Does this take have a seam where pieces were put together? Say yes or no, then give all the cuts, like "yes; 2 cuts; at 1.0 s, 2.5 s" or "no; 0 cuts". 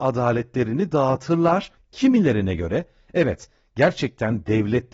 yes; 1 cut; at 1.8 s